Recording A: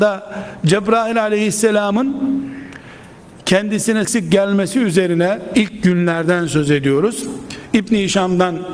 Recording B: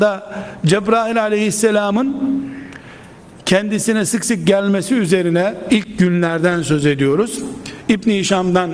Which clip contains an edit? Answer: A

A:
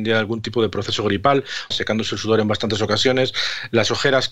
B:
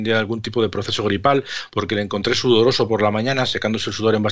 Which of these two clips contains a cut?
A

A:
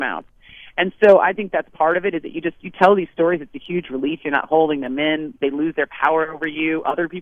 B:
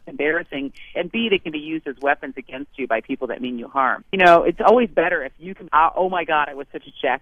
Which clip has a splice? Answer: B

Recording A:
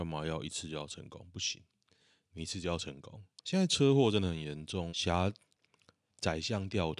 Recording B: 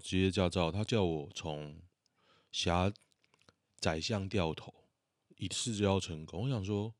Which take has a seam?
A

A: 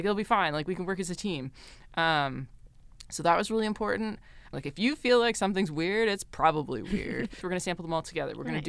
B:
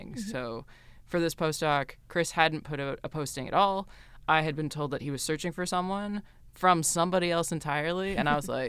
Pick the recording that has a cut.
A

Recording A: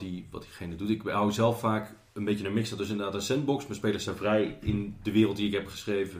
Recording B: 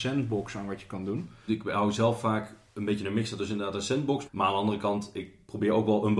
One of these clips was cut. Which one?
B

